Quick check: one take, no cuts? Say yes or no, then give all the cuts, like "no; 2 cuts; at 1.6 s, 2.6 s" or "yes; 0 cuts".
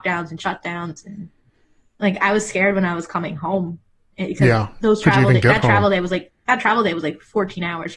yes; 0 cuts